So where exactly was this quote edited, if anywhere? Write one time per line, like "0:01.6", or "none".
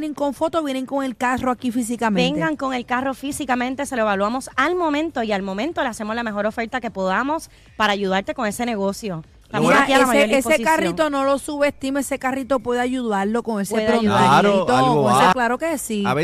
0:15.3